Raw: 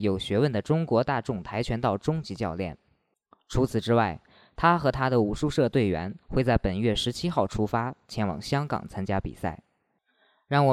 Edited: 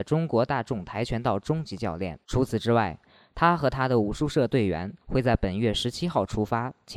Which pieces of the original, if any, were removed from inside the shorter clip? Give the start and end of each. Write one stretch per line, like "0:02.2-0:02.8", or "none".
0:02.8-0:03.4